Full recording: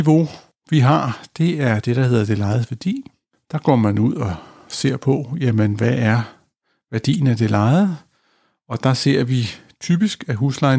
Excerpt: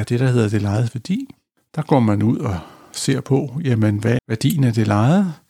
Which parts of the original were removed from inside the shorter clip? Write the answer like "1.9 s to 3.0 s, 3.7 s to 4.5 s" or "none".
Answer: 5.9 s to 6.8 s